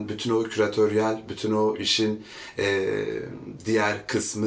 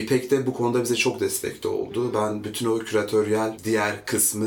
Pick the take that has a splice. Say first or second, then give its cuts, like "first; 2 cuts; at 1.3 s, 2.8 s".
second; 1 cut; at 3.6 s